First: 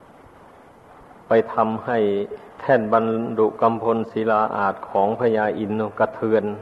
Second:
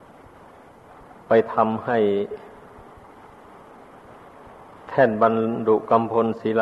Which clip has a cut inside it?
first; 1 cut; at 2.5 s

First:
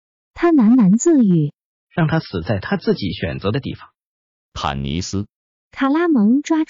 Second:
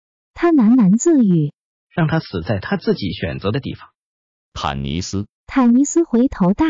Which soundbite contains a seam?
second; 1 cut; at 5.4 s

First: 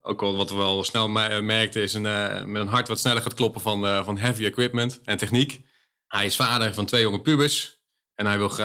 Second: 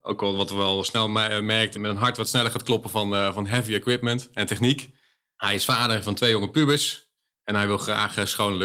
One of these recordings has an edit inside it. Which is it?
second; 1 cut; at 1.7 s

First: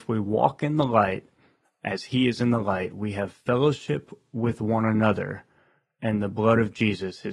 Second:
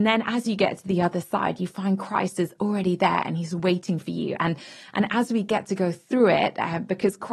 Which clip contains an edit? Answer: second; 1 cut; at 4.4 s

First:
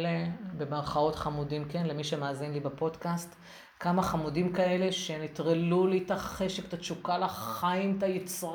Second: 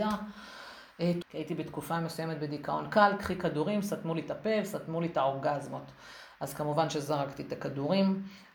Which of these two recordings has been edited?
second; 1 cut; at 1.2 s

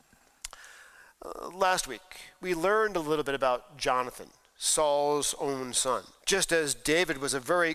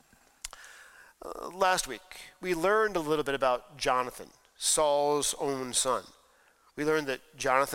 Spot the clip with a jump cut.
first; 1 cut; at 6.2 s

